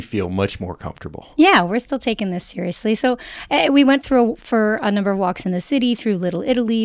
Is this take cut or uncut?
uncut